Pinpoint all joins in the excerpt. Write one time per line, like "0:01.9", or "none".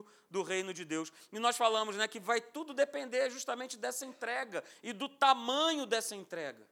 none